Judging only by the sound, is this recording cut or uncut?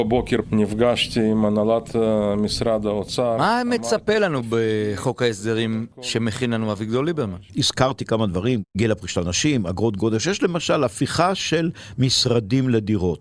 cut